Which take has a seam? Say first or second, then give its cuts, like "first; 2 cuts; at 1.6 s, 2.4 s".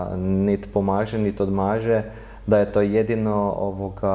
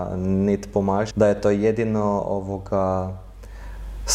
second; 1 cut; at 1.1 s